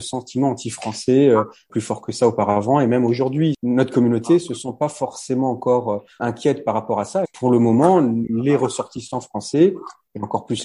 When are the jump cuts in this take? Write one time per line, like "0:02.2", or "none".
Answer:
0:07.2